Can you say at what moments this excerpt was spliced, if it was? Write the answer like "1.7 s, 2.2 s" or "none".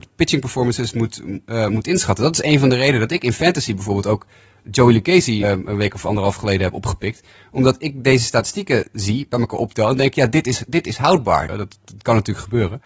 5.4 s, 11.5 s